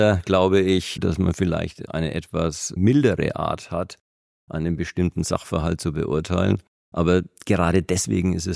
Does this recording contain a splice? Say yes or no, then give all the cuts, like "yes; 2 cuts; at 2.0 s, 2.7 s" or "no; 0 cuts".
yes; 1 cut; at 1.0 s